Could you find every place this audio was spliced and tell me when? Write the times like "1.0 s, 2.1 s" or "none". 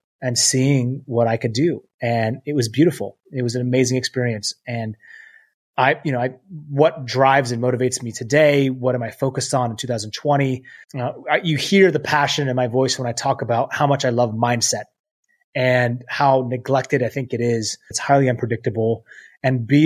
10.8 s, 17.9 s